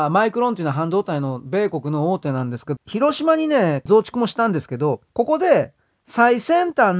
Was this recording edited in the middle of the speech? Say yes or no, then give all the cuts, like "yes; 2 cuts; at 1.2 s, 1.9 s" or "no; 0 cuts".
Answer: yes; 3 cuts; at 2.8 s, 3.9 s, 5.1 s